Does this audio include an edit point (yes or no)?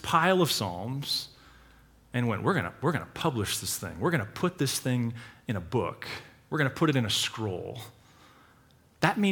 no